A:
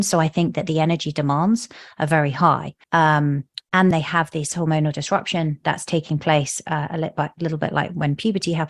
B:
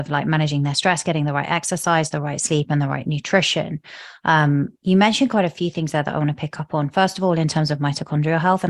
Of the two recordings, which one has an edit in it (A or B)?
A